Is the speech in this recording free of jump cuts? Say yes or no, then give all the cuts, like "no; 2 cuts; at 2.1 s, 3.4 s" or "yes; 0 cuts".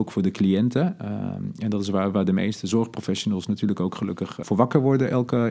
no; 1 cut; at 4.4 s